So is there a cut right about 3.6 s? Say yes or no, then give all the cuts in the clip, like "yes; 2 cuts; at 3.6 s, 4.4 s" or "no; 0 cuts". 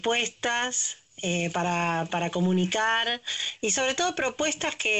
yes; 2 cuts; at 2.1 s, 3.6 s